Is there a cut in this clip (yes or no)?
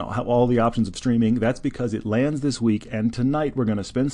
no